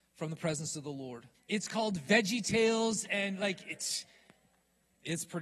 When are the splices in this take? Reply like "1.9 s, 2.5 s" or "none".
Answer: 1.3 s